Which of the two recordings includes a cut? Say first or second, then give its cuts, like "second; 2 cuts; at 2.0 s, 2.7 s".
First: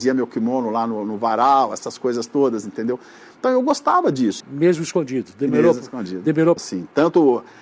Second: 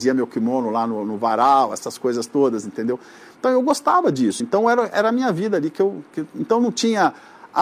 first; 2 cuts; at 4.4 s, 6.6 s